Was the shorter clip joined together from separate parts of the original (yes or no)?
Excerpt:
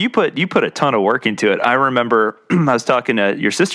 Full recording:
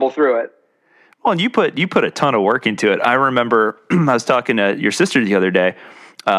no